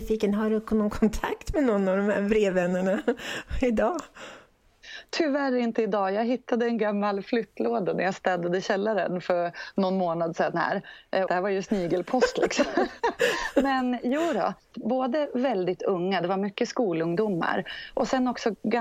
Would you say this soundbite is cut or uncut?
cut